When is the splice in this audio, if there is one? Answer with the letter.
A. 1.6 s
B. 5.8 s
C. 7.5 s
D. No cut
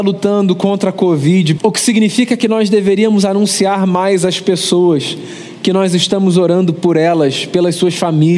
A